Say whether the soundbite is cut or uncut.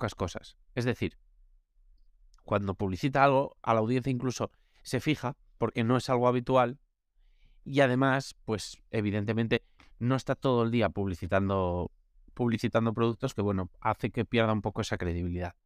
uncut